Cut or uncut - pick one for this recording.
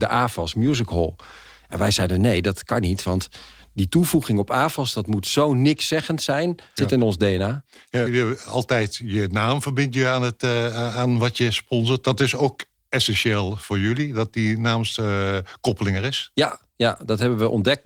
cut